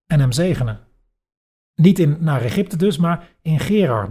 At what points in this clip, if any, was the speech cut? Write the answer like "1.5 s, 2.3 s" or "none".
1.7 s

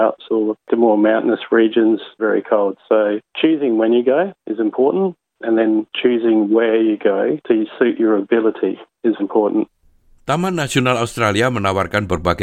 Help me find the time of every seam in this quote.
2.2 s, 9.2 s

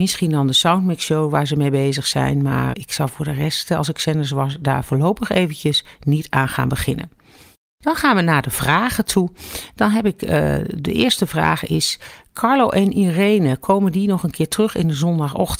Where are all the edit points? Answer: 2.7 s

